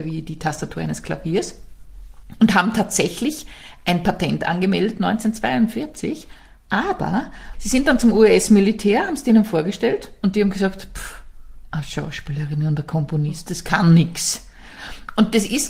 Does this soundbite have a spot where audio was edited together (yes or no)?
yes